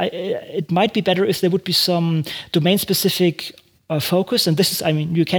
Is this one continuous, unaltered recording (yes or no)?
yes